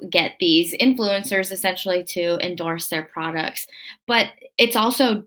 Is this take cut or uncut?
uncut